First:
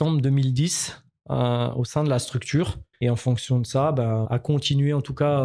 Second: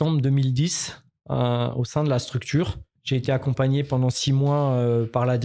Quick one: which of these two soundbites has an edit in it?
first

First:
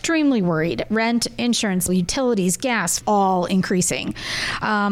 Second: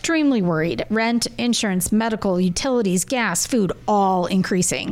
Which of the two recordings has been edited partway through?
first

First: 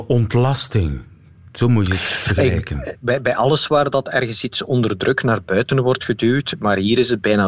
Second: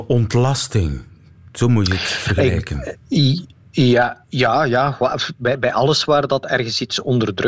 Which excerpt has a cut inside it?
first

